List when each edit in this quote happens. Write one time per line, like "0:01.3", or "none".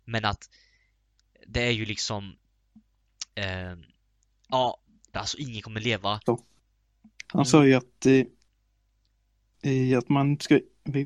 0:05.1
0:06.3